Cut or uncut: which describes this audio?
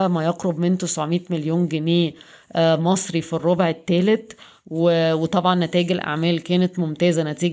uncut